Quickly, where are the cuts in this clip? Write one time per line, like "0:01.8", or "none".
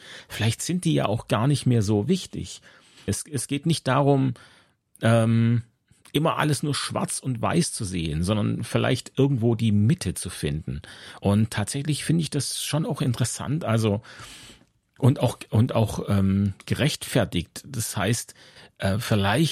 0:03.1
0:11.2